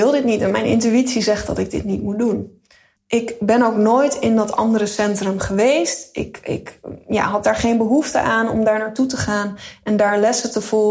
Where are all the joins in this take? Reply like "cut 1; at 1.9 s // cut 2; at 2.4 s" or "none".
cut 1; at 3.0 s